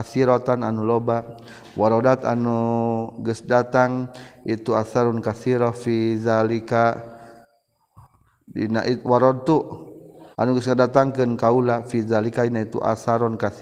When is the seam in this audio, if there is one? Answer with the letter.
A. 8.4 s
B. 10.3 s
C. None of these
B